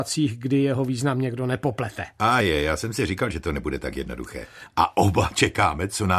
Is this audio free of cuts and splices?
no; 2 cuts; at 2.4 s, 4.7 s

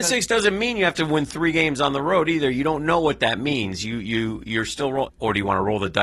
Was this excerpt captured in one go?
no; 1 cut; at 5.1 s

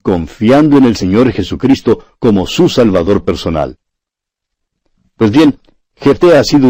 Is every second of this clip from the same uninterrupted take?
yes; 0 cuts

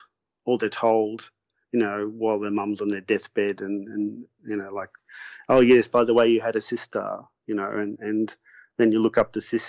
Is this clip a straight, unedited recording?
yes; 0 cuts

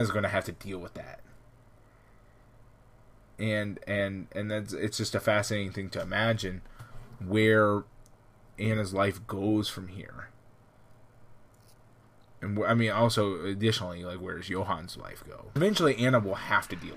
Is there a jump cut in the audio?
yes; 1 cut; at 15.6 s

